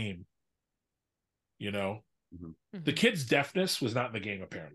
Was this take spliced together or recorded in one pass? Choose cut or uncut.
uncut